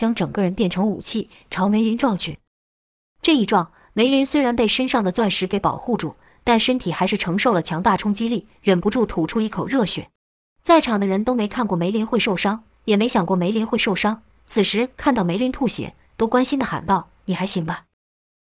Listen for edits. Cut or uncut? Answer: cut